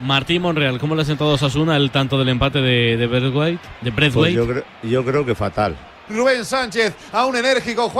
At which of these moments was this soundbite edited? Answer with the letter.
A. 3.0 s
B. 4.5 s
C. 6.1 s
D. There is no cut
C